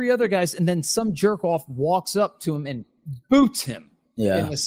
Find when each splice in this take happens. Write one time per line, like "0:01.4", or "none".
none